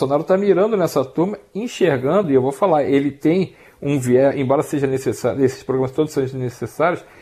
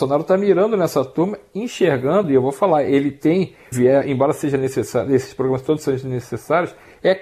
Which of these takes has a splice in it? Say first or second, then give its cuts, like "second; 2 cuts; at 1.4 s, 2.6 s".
second; 1 cut; at 3.7 s